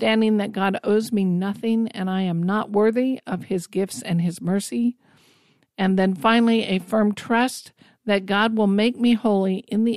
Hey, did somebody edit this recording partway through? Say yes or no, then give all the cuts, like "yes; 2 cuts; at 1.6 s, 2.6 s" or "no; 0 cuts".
no; 0 cuts